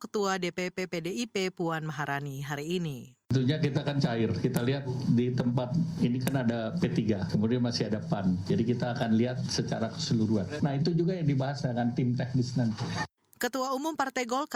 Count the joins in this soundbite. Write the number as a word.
one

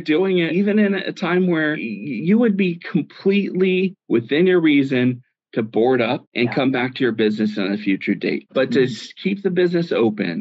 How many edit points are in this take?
one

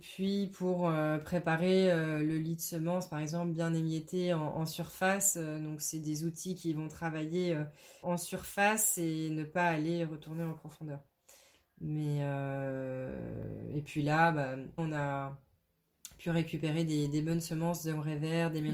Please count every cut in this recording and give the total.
two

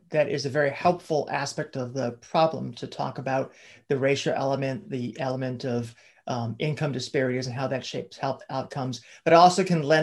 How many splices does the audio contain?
zero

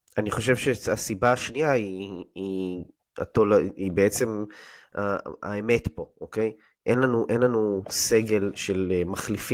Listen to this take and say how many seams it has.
zero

